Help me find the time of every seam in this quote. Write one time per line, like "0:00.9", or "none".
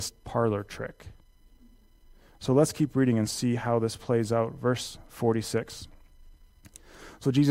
none